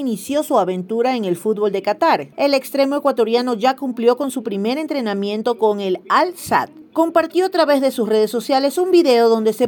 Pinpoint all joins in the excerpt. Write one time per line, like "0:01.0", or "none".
0:02.3